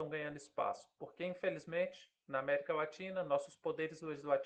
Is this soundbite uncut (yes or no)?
yes